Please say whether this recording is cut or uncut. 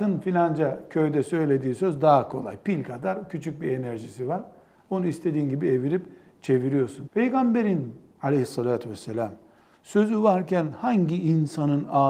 cut